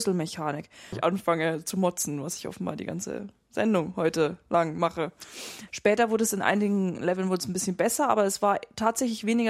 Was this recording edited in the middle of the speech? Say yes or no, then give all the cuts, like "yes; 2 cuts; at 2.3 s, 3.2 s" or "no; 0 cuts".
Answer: yes; 2 cuts; at 0.9 s, 5.7 s